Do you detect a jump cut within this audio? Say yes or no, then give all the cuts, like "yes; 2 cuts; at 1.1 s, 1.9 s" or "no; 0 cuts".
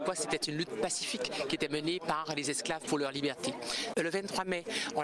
yes; 1 cut; at 3.9 s